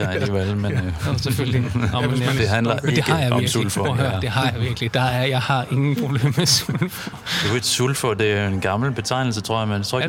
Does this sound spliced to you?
yes; 1 cut; at 2.4 s

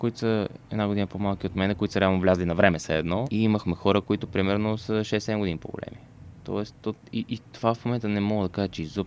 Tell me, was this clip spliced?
yes; 1 cut; at 3.2 s

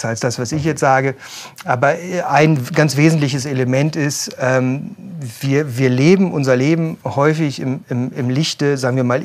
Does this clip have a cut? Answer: no; 0 cuts

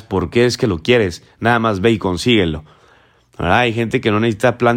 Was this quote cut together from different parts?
no; 0 cuts

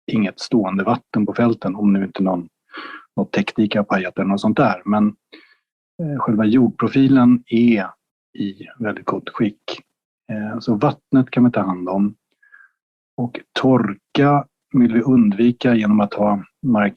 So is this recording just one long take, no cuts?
yes; 0 cuts

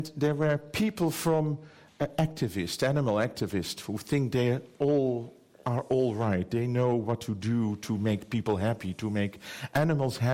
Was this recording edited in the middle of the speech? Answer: no; 0 cuts

